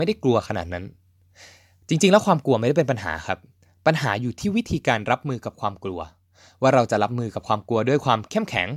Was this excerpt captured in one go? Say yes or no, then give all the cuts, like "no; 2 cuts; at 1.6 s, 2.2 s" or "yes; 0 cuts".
yes; 0 cuts